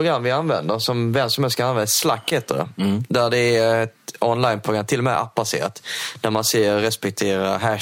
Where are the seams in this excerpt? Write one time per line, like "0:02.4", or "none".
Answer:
none

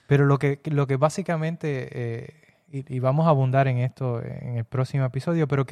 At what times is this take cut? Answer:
none

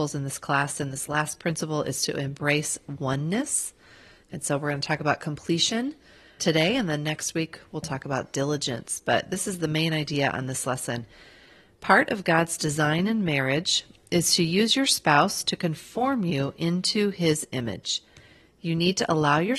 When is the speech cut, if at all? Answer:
0:06.4

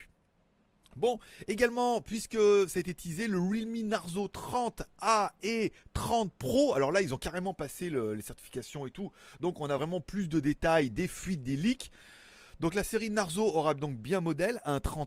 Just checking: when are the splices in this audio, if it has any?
none

